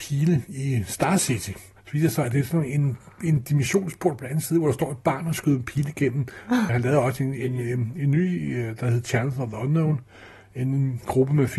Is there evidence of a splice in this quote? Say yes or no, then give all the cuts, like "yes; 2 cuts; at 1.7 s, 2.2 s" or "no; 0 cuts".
yes; 1 cut; at 6.7 s